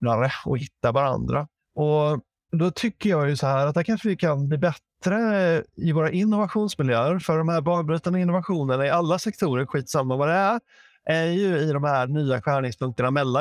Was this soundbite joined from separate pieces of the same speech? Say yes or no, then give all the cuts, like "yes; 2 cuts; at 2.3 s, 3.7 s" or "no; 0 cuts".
no; 0 cuts